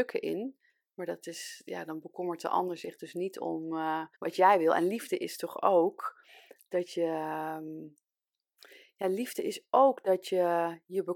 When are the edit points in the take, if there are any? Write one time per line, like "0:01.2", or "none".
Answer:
0:04.1